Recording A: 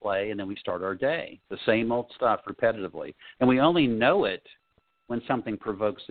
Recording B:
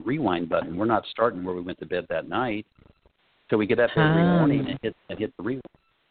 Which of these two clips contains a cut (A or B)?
A